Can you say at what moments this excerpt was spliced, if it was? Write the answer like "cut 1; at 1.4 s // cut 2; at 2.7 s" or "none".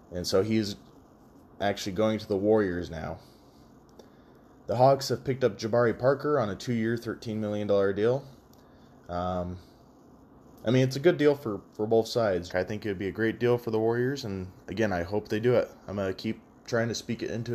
cut 1; at 12.5 s